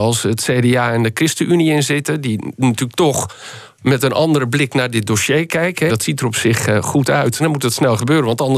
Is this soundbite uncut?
no; 2 cuts; at 5.9 s, 7.4 s

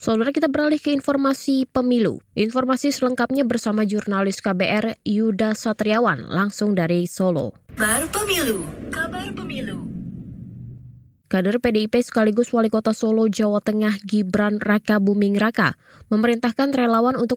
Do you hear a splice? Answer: yes; 2 cuts; at 2.2 s, 7.8 s

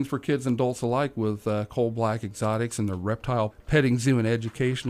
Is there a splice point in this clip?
yes; 1 cut; at 3.5 s

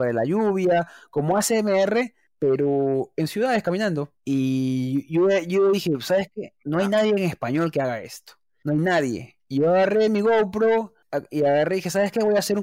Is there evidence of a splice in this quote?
no; 0 cuts

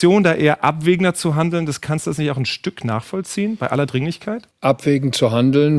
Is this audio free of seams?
no; 1 cut; at 4.5 s

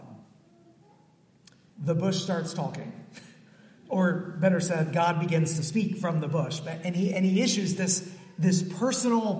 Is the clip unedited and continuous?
no; 1 cut; at 1.7 s

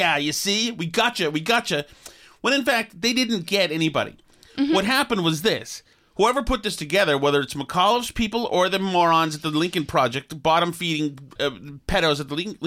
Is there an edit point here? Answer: yes; 1 cut; at 11.3 s

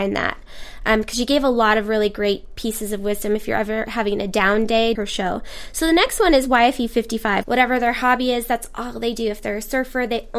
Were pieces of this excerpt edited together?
yes; 2 cuts; at 5.0 s, 7.4 s

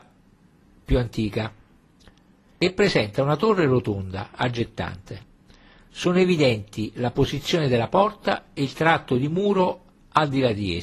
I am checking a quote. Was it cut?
no; 0 cuts

